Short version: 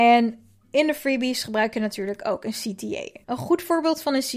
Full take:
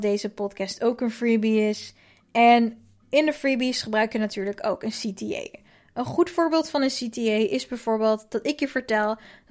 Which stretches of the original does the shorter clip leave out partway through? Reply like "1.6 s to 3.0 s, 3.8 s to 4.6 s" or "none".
5.6 s to 5.9 s

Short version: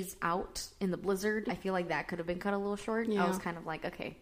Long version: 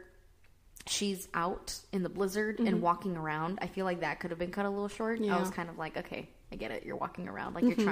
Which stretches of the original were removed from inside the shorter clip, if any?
2.6 s to 3.6 s

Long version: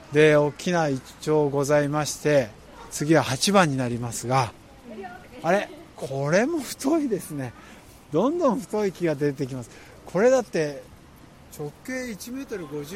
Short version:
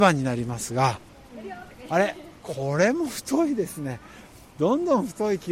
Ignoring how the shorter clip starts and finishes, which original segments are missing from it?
none

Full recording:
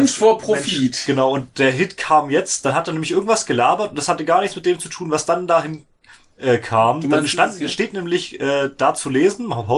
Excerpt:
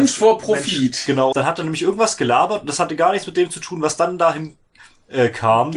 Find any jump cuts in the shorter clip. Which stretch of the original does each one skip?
1.3 s to 2.6 s

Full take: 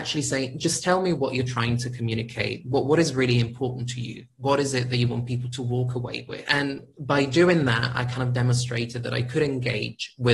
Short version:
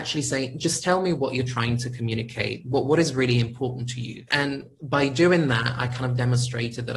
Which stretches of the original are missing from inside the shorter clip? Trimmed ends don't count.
4.3 s to 6.4 s

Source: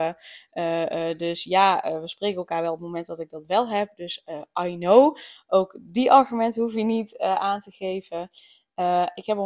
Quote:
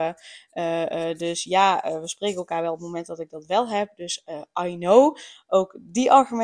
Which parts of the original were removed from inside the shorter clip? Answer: none

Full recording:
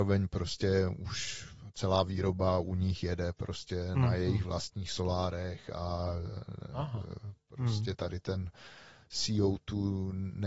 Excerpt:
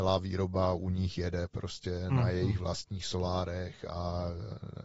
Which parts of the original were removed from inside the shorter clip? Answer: none

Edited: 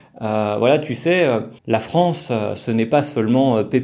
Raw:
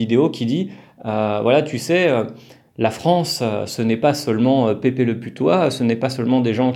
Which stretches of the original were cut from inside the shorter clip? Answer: 2.4 s to 2.7 s

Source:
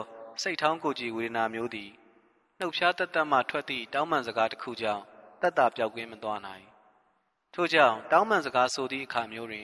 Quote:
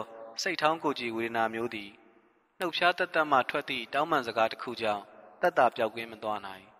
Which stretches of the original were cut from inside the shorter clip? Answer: none

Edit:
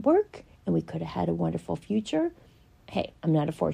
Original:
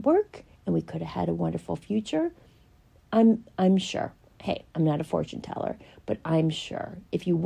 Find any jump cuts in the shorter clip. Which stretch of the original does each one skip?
2.8 s to 4.3 s

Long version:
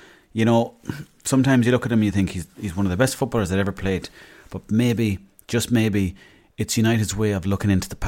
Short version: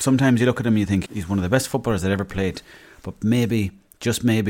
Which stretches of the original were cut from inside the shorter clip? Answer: 2.3 s to 2.5 s

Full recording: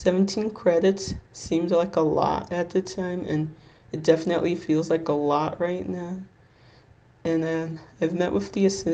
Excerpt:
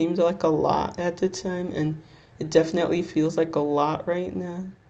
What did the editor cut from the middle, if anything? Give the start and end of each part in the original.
none

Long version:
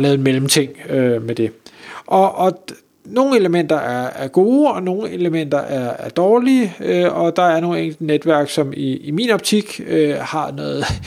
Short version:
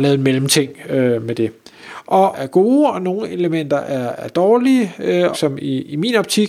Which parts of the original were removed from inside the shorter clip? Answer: 2.3 s to 4.1 s, 7.1 s to 8.5 s

